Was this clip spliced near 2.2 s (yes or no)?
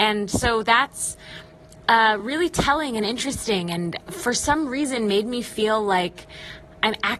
no